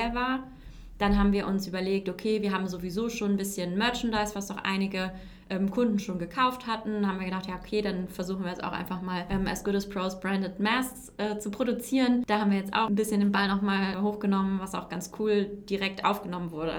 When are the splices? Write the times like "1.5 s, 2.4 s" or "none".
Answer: none

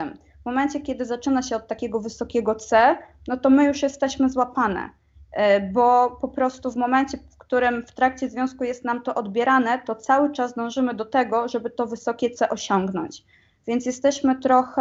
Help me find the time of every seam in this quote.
none

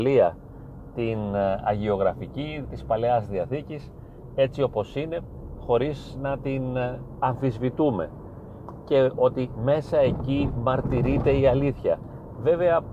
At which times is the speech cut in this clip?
2.6 s

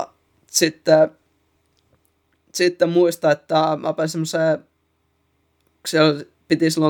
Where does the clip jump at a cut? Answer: none

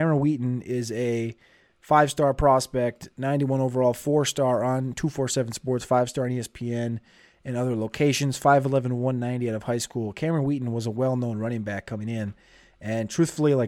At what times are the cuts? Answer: none

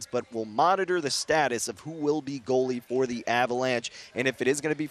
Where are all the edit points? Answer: none

